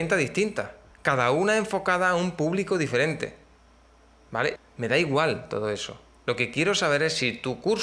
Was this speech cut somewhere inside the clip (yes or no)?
yes